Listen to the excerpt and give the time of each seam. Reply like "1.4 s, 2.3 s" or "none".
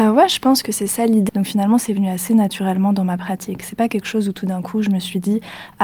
1.3 s

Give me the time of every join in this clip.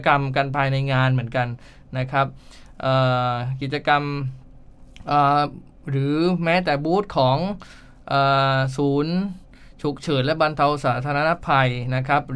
none

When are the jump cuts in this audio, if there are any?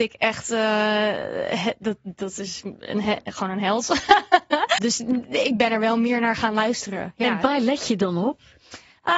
4.8 s

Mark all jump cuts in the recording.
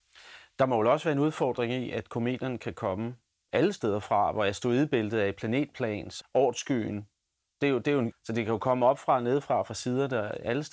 6.2 s, 8.1 s

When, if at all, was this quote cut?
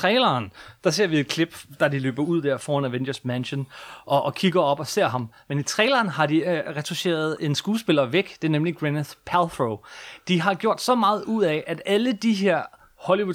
none

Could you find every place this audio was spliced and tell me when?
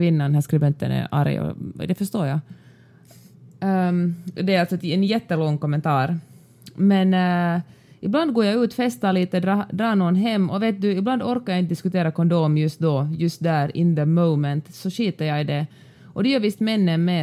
none

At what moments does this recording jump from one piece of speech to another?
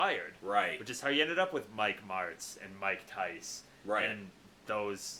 none

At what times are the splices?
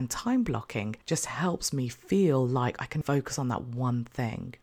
1.0 s, 3.0 s

